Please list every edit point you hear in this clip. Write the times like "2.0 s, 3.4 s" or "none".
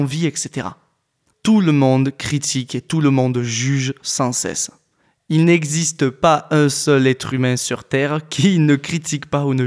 1.3 s